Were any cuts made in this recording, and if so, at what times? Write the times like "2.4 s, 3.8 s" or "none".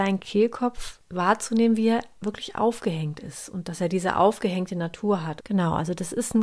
5.4 s